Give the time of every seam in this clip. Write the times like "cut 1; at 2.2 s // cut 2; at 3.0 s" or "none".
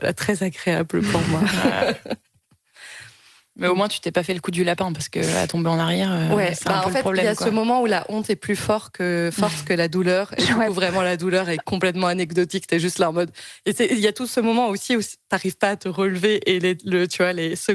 none